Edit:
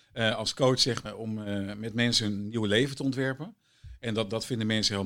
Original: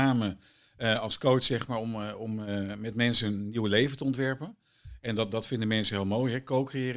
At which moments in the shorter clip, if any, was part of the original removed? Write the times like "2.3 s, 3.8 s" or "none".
1.1 s